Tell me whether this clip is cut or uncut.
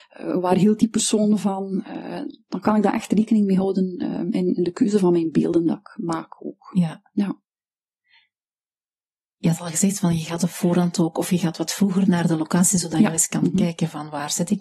uncut